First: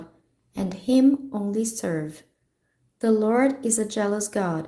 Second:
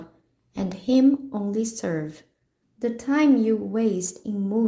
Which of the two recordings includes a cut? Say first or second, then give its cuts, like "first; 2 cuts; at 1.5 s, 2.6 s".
second; 1 cut; at 2.6 s